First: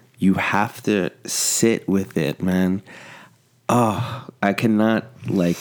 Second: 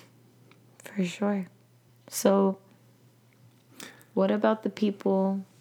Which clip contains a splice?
second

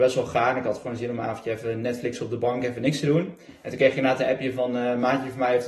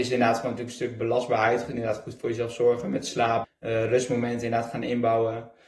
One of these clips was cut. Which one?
second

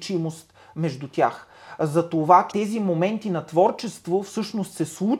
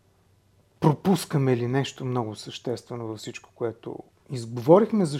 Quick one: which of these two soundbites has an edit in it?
first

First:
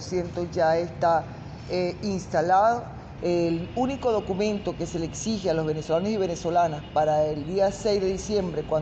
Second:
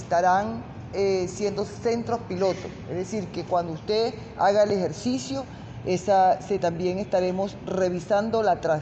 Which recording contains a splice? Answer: first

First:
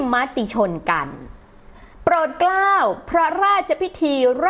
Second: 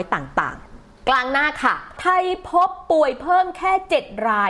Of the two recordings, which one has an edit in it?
first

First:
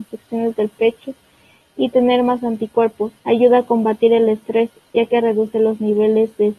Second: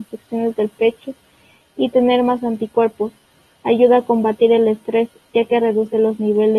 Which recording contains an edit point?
first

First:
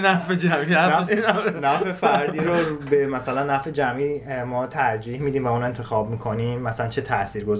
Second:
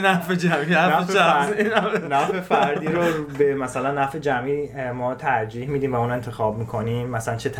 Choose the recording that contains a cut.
first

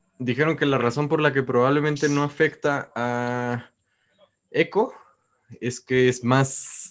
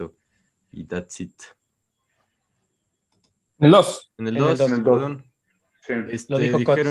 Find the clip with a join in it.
second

